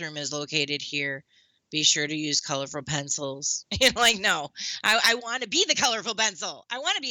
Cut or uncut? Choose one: uncut